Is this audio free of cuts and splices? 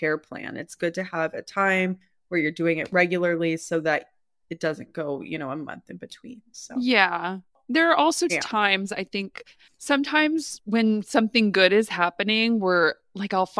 no; 1 cut; at 8.3 s

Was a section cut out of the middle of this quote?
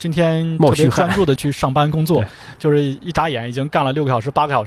yes; 1 cut; at 1.4 s

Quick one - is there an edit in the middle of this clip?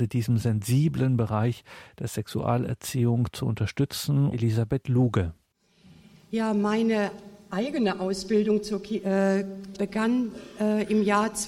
yes; 2 cuts; at 4.3 s, 9.7 s

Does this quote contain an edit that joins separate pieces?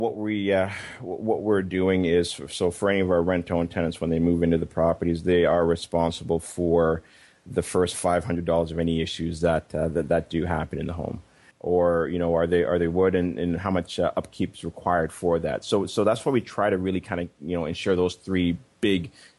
yes; 1 cut; at 11.5 s

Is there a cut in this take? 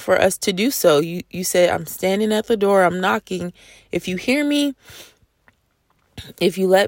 no; 0 cuts

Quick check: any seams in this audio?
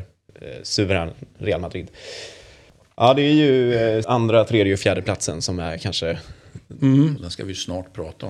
yes; 2 cuts; at 4.0 s, 7.2 s

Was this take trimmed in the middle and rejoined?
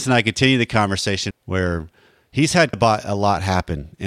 yes; 2 cuts; at 1.3 s, 2.7 s

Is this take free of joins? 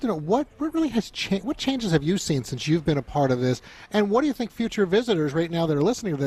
yes; 0 cuts

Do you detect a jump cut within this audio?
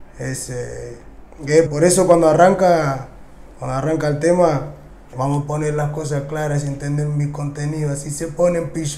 yes; 2 cuts; at 1.7 s, 5.1 s

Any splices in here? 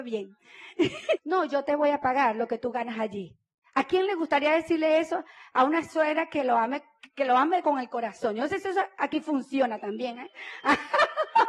yes; 1 cut; at 1.2 s

